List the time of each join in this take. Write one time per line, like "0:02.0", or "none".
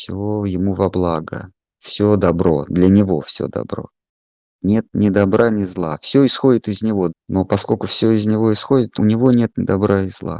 0:07.1
0:09.0